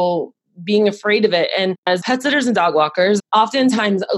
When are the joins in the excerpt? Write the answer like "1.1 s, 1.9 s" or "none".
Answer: 3.2 s